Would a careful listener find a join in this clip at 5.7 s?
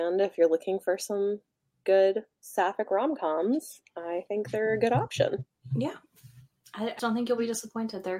no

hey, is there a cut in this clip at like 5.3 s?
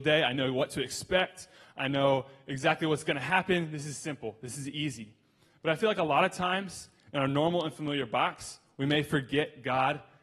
no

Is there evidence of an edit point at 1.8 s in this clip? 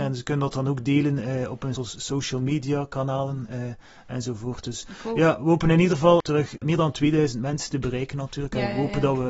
yes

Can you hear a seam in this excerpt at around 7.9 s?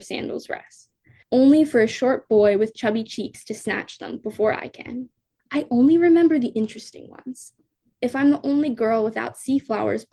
yes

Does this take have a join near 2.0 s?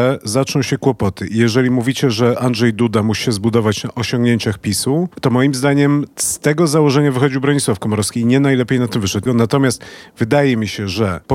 no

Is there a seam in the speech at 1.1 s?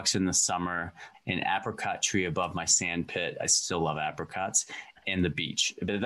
yes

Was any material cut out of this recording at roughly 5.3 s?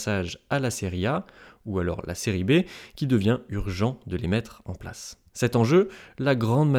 yes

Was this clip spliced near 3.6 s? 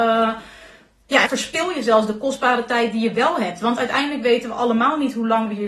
no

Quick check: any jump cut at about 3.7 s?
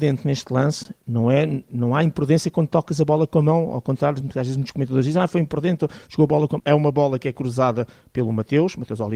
no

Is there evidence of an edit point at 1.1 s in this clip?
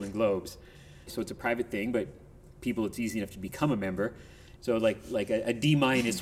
yes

